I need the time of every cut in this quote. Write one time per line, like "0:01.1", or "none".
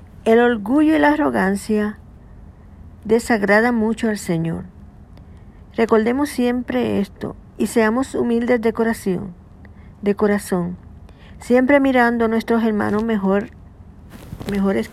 none